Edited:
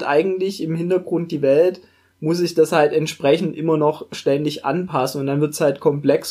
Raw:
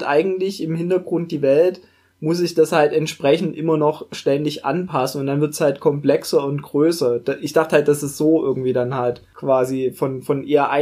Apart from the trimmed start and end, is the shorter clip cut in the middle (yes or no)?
no